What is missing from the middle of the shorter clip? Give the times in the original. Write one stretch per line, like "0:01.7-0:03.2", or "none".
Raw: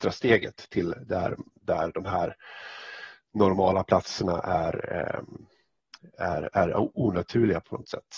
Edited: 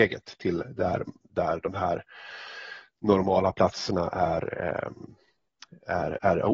none